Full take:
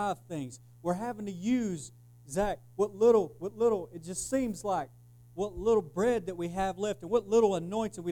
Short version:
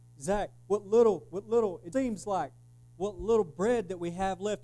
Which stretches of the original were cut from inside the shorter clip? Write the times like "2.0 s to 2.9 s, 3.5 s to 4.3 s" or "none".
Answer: 4.0 s to 4.3 s